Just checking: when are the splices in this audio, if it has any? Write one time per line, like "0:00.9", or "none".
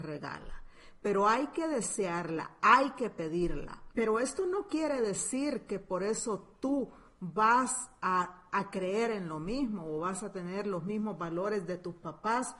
0:03.9